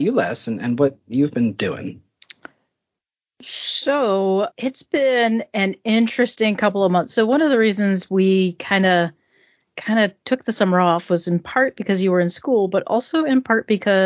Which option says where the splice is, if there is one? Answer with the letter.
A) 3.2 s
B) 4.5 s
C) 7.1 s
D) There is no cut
B